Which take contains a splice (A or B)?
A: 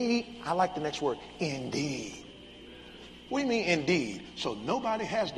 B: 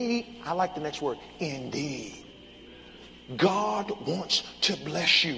B